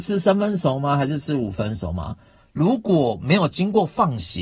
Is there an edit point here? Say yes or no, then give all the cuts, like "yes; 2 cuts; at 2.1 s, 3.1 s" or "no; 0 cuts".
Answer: yes; 1 cut; at 2.4 s